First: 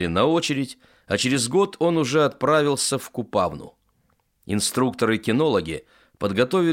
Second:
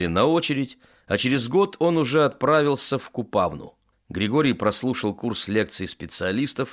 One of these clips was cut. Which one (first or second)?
second